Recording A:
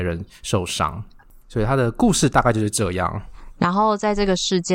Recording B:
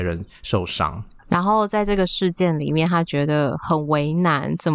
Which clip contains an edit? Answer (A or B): B